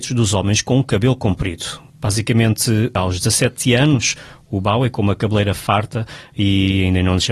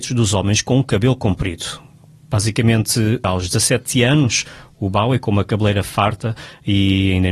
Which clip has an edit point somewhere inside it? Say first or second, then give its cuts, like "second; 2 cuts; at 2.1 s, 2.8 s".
first; 1 cut; at 1.9 s